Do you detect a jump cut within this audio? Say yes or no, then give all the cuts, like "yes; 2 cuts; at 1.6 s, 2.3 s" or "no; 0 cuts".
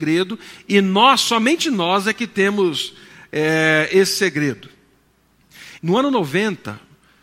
yes; 1 cut; at 5.8 s